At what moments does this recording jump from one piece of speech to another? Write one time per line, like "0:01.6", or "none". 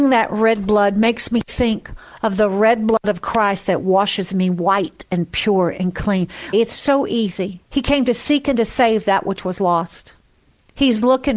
0:06.5
0:07.6